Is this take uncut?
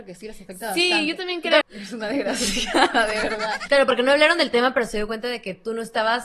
no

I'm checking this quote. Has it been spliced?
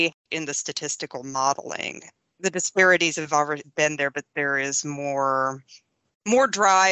yes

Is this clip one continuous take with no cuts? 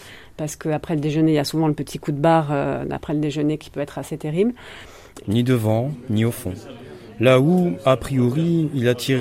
no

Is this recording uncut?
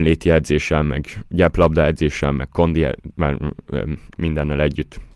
no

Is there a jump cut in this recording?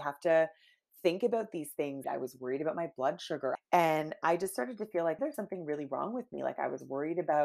yes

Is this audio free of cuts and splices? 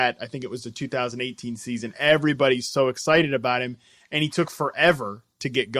yes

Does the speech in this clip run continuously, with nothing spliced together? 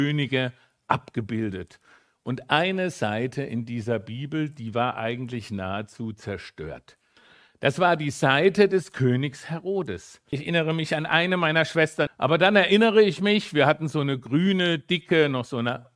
no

